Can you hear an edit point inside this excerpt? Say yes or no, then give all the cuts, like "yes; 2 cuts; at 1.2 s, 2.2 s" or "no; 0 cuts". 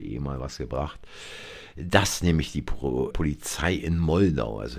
yes; 1 cut; at 3.1 s